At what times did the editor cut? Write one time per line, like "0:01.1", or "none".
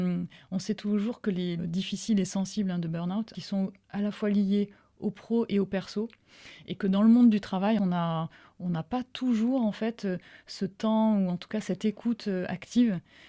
0:01.6